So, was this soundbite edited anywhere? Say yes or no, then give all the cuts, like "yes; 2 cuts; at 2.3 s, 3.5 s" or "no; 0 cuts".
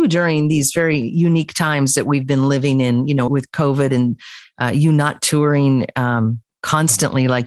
yes; 1 cut; at 3.3 s